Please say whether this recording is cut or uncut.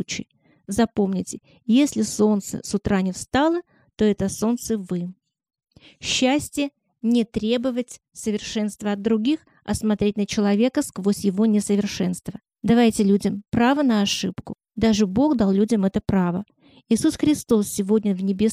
uncut